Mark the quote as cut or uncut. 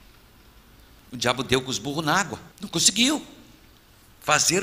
cut